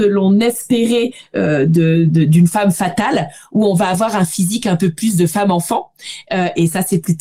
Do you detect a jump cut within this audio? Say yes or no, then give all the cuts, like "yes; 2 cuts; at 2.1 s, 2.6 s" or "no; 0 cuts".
no; 0 cuts